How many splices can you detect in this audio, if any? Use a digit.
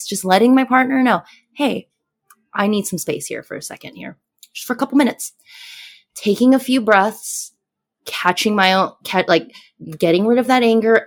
0